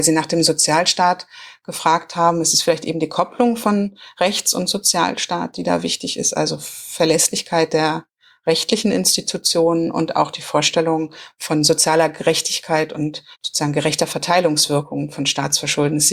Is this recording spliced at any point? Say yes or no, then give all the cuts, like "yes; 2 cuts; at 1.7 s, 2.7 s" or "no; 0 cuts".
yes; 1 cut; at 13.3 s